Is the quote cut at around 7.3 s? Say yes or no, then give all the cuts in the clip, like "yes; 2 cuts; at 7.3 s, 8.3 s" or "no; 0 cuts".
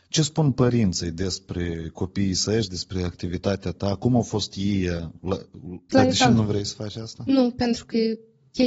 yes; 2 cuts; at 5.9 s, 7.3 s